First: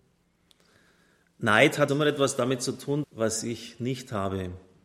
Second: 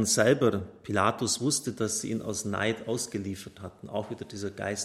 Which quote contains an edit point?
first; 2 cuts; at 1.9 s, 3.0 s

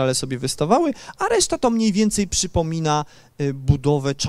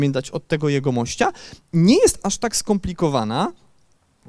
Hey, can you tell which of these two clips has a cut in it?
second; 1 cut; at 1.6 s

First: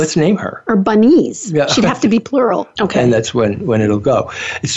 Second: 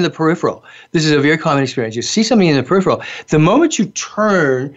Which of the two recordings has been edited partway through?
first; 1 cut; at 2.7 s

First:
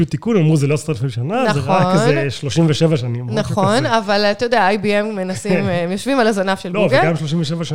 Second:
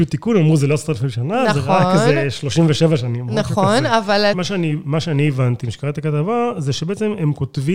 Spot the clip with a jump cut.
second; 1 cut; at 4.3 s

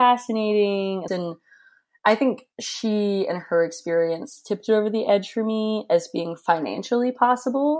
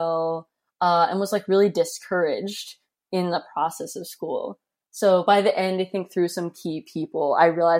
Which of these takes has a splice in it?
first; 2 cuts; at 1.1 s, 2.5 s

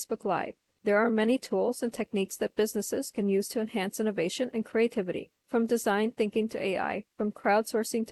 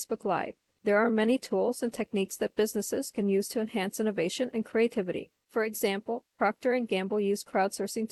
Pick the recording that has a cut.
second; 1 cut; at 5.4 s

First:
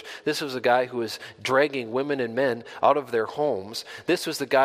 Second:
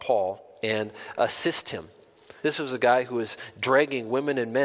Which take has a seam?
second; 1 cut; at 2.4 s

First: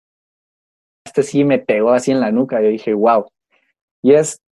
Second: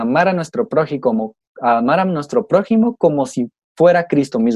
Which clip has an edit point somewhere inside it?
first; 1 cut; at 1.1 s

